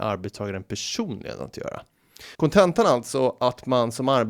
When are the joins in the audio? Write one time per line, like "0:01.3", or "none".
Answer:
0:02.3